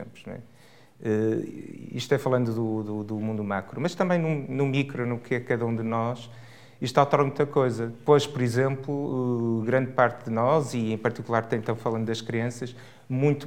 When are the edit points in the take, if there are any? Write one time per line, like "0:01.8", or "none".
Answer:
none